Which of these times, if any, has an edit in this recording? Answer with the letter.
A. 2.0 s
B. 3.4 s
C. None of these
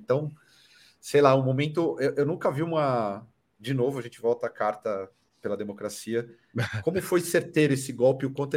C